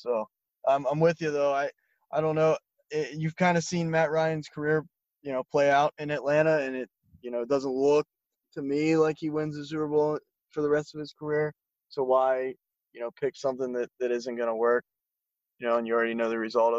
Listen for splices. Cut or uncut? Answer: uncut